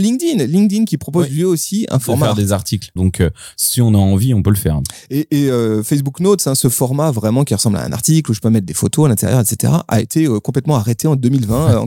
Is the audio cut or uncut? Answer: cut